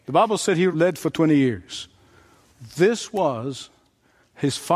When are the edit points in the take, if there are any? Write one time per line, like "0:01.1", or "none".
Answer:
none